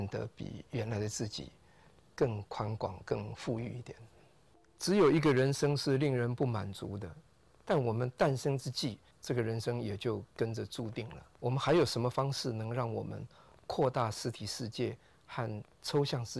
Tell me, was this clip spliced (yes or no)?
yes